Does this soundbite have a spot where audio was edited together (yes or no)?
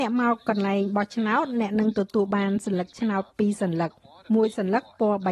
no